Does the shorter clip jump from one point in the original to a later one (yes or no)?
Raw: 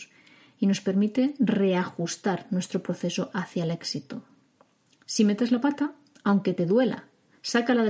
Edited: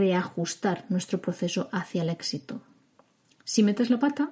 no